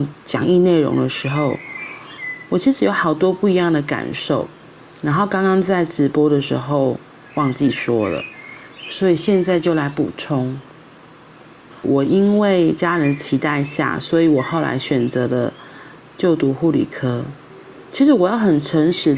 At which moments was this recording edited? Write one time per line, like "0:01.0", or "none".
0:11.7